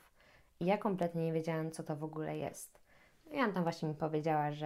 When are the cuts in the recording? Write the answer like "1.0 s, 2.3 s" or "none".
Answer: none